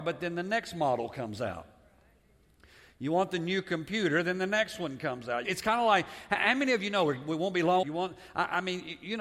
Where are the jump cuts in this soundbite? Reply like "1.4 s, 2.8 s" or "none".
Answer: 5.4 s, 7.8 s